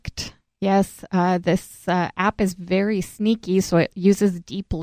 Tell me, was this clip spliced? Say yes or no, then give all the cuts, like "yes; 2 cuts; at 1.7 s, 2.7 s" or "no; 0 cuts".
no; 0 cuts